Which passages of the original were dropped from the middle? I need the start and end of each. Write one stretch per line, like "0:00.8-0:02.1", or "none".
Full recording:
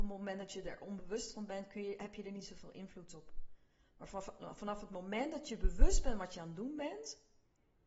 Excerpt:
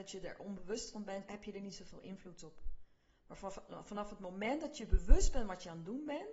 0:01.7-0:02.0